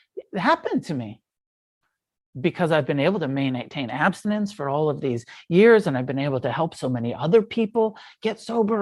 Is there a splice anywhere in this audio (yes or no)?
no